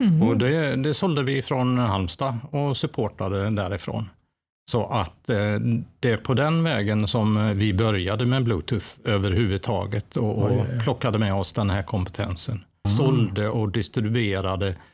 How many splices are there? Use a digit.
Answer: 1